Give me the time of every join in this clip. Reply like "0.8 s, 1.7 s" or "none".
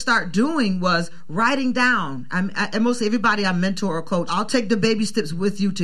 4.3 s